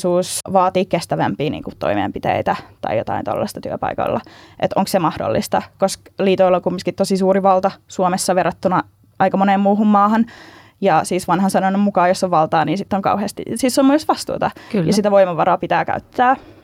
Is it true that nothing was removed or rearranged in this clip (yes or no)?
yes